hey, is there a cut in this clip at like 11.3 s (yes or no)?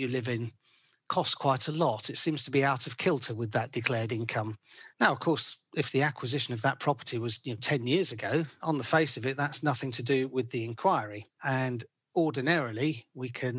no